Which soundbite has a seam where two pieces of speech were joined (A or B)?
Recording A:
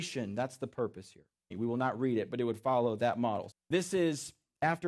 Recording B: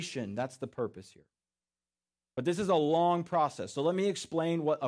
A